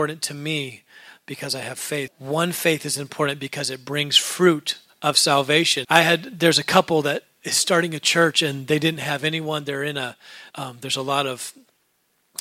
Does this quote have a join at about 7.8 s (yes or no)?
no